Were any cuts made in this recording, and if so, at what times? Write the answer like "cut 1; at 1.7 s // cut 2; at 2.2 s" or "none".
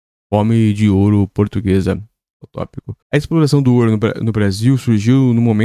cut 1; at 3.0 s